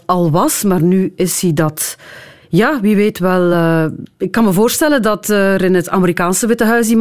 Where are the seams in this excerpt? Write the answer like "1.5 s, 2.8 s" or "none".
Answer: none